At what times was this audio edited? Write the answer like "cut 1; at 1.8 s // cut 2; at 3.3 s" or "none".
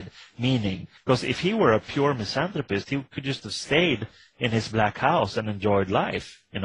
cut 1; at 1.0 s

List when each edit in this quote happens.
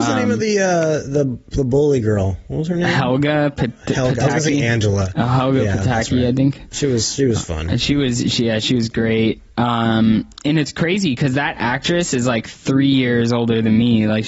none

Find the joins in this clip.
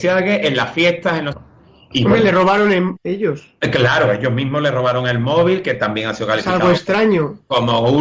cut 1; at 1.3 s // cut 2; at 3.0 s

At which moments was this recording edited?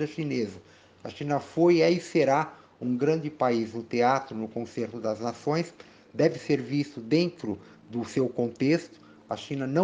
none

